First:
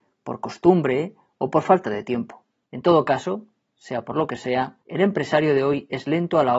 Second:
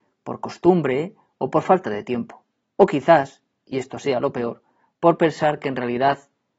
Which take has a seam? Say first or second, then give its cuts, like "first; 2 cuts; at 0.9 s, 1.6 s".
first; 2 cuts; at 2.7 s, 4.8 s